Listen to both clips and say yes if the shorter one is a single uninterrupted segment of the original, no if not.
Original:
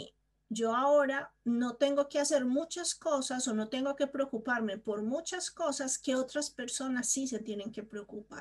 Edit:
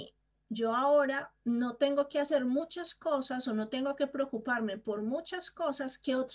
yes